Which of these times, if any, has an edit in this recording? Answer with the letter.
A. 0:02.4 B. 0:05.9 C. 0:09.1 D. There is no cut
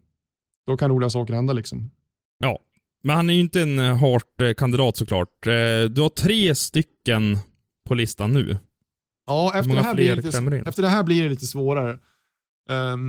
A